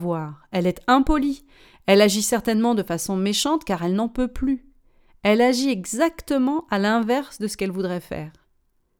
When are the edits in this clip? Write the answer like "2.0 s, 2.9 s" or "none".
none